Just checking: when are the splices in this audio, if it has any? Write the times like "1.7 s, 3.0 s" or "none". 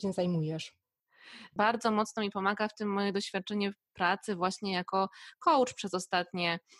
1.6 s